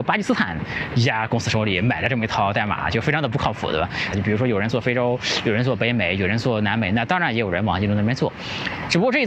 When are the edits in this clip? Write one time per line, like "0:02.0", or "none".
0:04.1